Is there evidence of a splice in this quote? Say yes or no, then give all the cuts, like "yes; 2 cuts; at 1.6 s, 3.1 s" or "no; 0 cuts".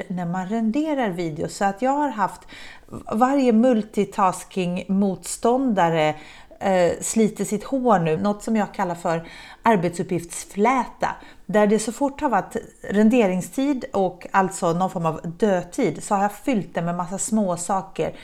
yes; 1 cut; at 8.2 s